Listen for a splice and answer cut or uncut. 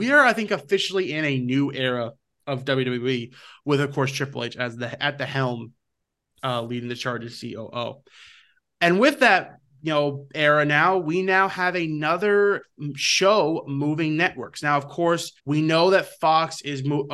cut